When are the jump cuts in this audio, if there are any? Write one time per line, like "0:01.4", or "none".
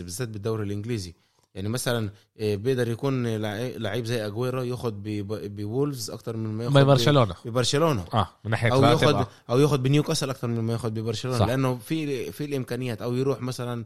none